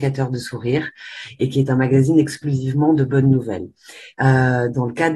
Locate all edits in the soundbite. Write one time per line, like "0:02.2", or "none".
0:04.1